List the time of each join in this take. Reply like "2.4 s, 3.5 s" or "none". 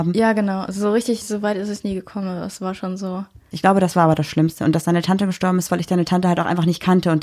3.5 s, 5.7 s